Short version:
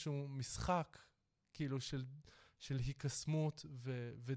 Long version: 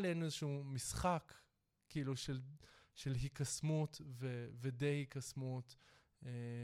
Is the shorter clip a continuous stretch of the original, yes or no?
yes